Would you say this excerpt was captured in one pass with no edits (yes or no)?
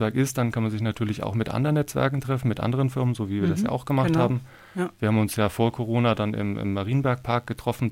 yes